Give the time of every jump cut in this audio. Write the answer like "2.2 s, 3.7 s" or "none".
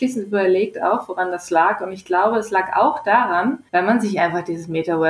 3.7 s

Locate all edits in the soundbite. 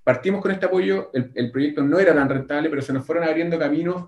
1.3 s

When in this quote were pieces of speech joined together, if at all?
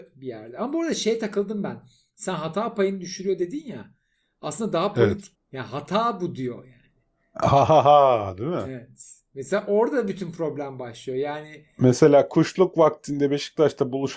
5.3 s

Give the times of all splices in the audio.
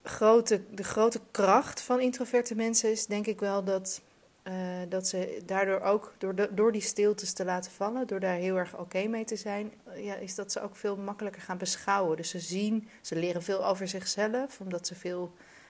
9.9 s

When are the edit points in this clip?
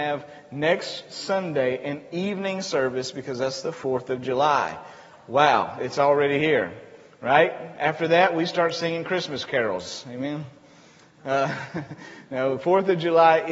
none

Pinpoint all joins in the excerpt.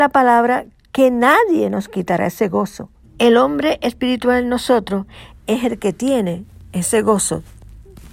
3.0 s

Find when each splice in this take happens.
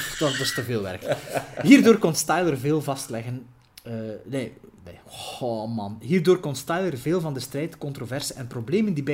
none

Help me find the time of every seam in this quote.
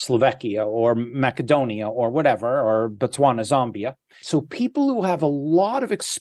4.2 s

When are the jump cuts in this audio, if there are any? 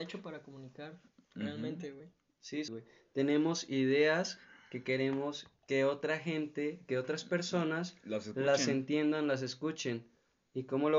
2.7 s

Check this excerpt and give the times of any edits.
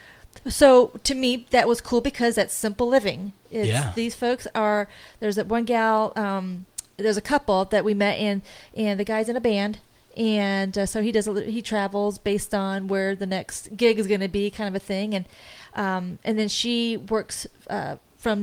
none

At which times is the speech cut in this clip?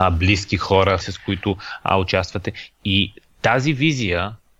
1.0 s

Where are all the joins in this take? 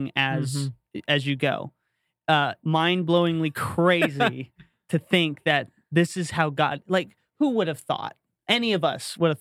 2.6 s

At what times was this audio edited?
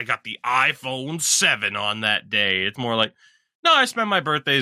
2.8 s

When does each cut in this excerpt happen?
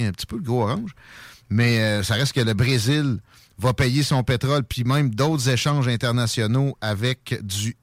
none

